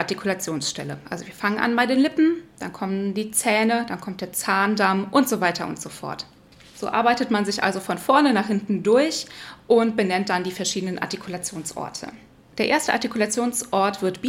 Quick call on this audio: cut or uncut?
uncut